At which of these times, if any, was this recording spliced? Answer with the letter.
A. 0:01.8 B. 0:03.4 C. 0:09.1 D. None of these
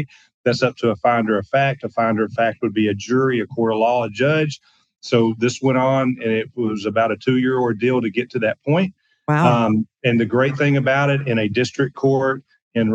D